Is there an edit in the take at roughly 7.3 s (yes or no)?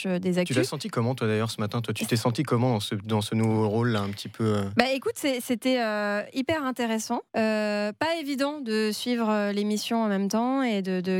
yes